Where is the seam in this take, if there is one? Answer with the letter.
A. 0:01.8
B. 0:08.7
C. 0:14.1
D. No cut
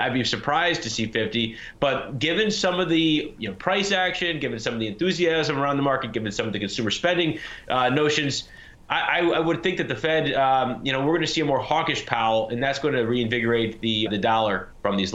C